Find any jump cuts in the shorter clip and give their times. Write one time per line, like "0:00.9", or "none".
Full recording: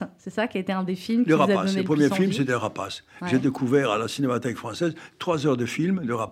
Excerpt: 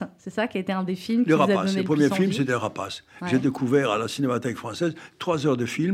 none